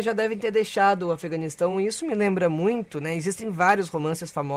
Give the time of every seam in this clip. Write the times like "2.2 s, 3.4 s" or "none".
none